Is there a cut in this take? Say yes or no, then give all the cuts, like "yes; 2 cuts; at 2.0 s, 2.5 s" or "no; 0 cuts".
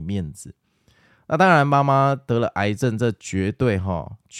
no; 0 cuts